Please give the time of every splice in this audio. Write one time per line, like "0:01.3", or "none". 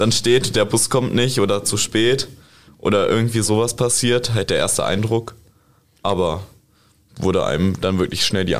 none